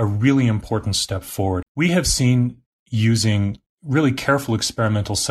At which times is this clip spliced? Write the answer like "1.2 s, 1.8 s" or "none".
1.6 s